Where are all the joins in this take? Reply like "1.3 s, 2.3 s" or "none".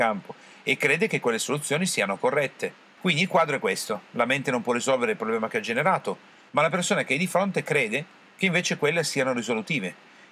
3.0 s, 6.5 s